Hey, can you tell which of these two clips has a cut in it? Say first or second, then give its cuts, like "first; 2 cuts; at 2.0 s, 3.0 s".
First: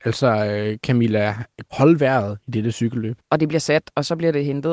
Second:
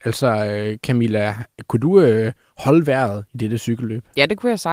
first; 2 cuts; at 1.7 s, 3.2 s